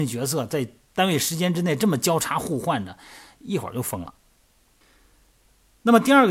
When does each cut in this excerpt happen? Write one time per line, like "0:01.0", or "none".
none

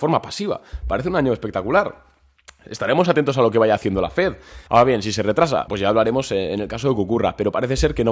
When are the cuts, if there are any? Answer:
0:04.7
0:05.7

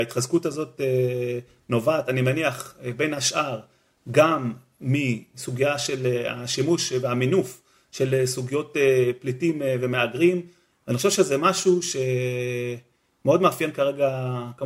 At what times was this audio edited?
0:10.7

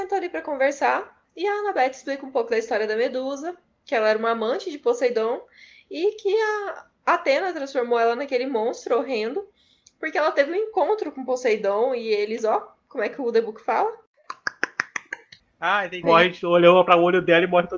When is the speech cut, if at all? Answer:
0:16.0

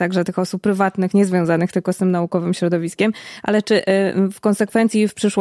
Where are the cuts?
none

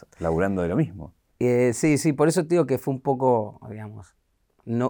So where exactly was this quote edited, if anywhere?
none

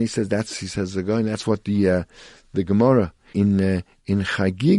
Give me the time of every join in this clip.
0:03.3

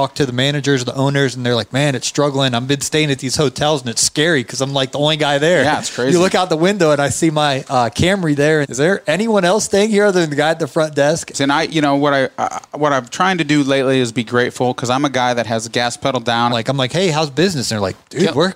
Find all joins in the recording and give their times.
0:08.6
0:11.3
0:16.5

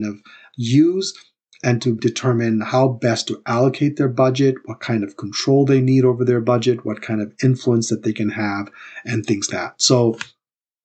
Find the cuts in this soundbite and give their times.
0:02.0
0:09.5

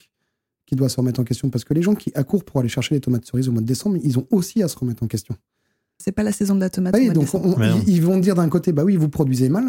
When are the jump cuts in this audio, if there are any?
none

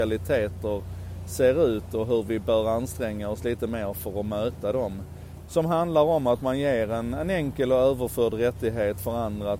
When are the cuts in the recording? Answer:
0:05.4

